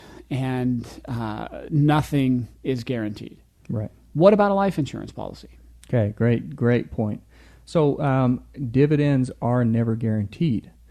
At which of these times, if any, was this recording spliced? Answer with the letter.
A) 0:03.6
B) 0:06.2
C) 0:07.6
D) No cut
D